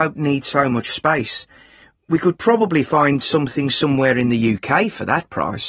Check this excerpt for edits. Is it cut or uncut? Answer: uncut